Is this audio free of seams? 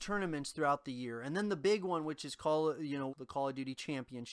no; 1 cut; at 3.1 s

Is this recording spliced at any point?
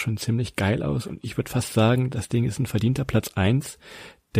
no; 0 cuts

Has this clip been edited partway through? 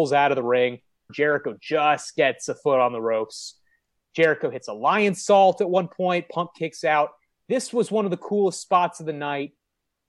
yes; 1 cut; at 1.1 s

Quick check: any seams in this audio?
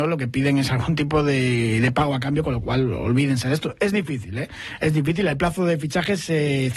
no; 0 cuts

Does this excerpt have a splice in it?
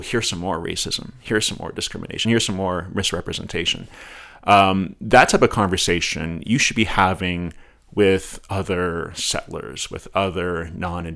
no; 0 cuts

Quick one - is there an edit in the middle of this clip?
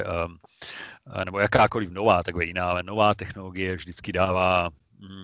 no; 0 cuts

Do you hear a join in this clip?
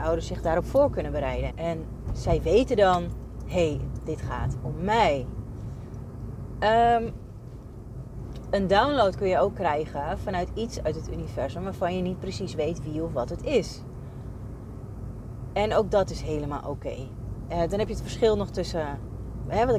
yes; 1 cut; at 1.5 s

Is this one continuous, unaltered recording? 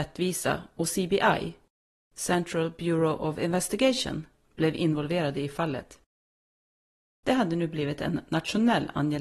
yes; 0 cuts

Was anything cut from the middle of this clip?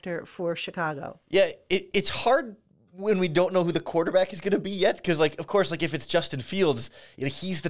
no; 0 cuts

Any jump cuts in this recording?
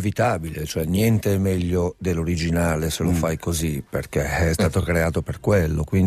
no; 0 cuts

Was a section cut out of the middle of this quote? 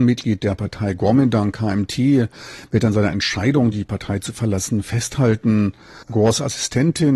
no; 0 cuts

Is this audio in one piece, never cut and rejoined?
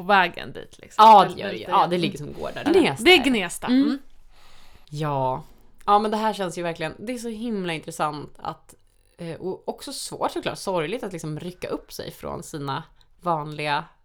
no; 2 cuts; at 2.7 s, 4.8 s

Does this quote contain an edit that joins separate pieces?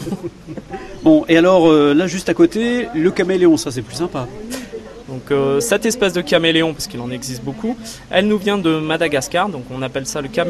yes; 1 cut; at 5.0 s

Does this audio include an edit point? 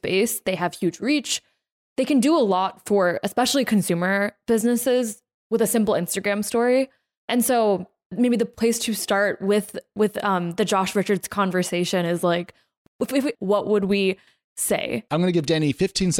yes; 2 cuts; at 13.3 s, 15.1 s

